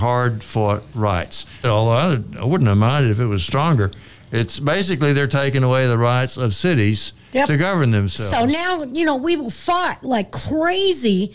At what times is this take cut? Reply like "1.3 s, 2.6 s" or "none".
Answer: 1.6 s